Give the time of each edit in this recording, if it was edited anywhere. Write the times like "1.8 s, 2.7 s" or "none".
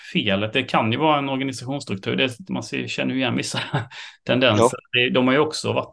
2.5 s